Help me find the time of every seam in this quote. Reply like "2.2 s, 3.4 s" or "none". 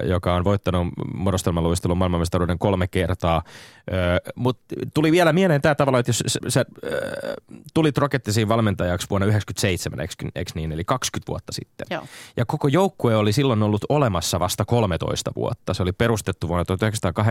6.4 s